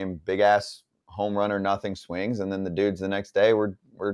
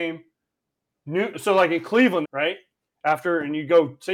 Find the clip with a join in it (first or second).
second